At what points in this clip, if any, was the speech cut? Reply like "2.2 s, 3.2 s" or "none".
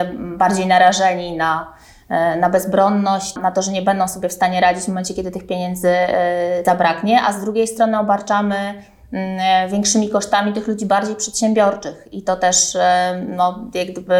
3.4 s, 6.6 s